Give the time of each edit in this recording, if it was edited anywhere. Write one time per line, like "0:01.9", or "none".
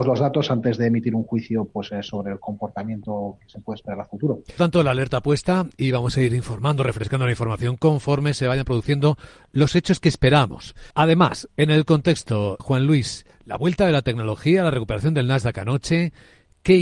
0:04.6
0:10.9
0:12.6